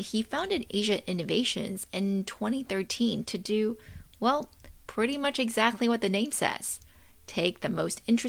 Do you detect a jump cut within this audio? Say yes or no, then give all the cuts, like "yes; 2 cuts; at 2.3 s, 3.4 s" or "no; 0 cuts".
no; 0 cuts